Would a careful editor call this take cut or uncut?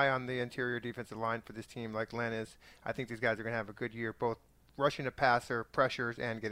uncut